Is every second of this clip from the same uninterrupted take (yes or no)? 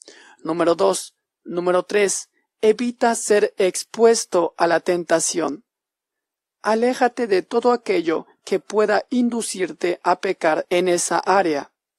no